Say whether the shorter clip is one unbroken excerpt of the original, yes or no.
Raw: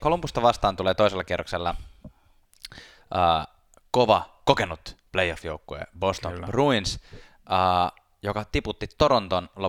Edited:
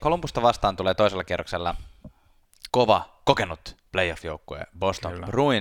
no